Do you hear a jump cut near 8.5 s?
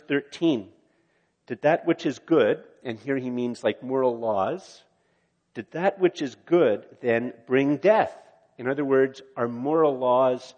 no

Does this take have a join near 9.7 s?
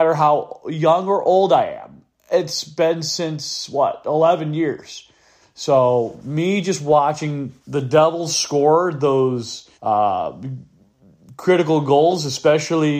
yes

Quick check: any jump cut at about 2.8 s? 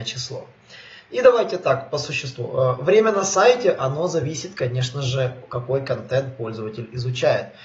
no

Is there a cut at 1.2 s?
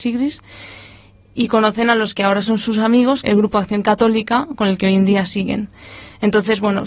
no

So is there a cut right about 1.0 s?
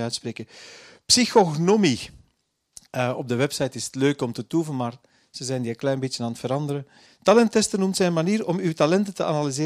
no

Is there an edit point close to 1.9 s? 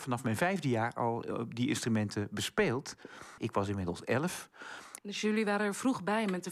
no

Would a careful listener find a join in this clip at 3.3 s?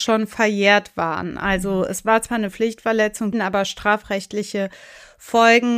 yes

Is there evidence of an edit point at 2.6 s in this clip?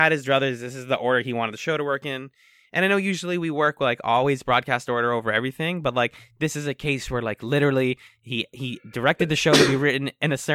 no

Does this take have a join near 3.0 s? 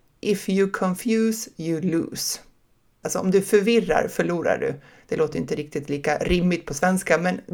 yes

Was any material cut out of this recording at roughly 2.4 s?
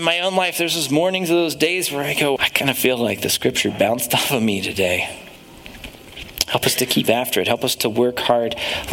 yes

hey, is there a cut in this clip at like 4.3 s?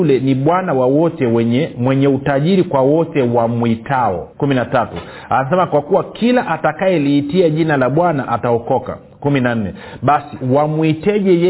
yes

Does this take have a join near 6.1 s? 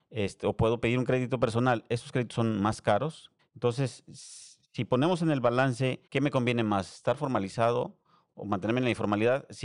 yes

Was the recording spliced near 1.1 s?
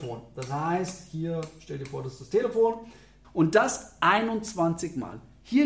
no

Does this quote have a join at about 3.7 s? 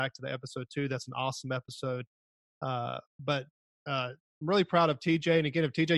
no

